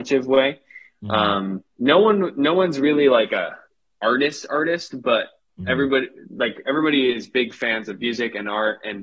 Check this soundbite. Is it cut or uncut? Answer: cut